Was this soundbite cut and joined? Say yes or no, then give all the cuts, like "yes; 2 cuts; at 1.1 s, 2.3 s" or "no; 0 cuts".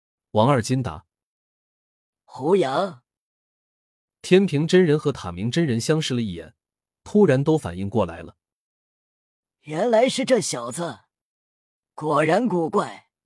no; 0 cuts